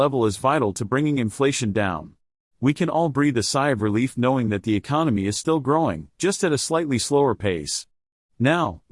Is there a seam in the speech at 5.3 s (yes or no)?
no